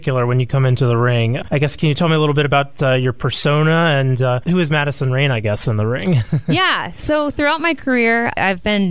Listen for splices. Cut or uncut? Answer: uncut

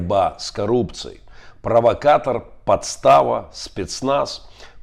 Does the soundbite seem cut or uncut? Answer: uncut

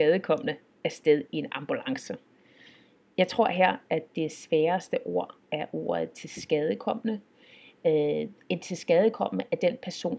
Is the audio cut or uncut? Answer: uncut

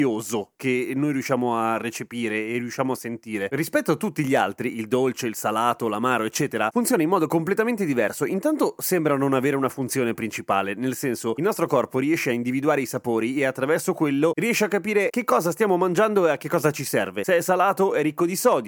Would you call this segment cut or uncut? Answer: uncut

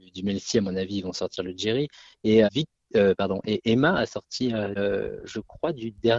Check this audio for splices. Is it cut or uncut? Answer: cut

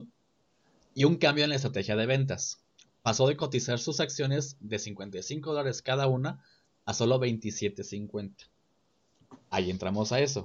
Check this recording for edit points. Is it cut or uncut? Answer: uncut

